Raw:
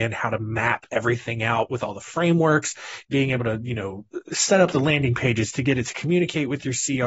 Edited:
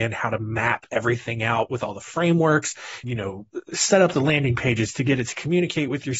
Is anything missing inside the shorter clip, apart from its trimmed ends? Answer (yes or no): yes